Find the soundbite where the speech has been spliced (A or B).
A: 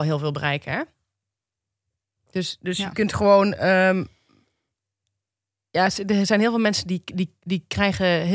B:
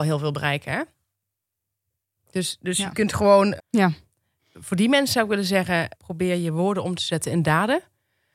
B